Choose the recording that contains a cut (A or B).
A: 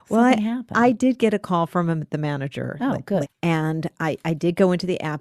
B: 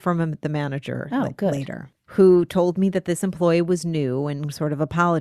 A